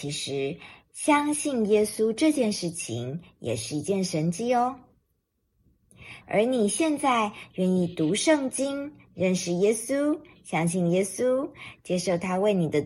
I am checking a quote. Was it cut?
yes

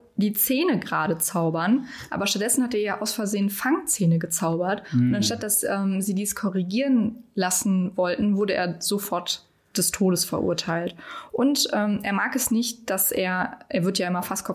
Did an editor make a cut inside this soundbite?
no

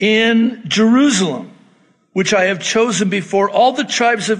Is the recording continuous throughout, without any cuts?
yes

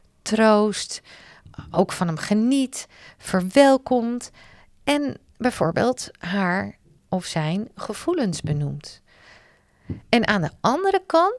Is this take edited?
no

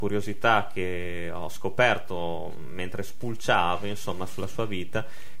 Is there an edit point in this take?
no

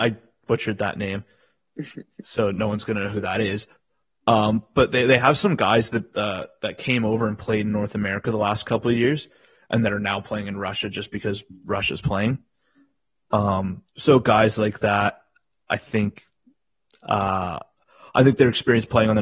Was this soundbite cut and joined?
yes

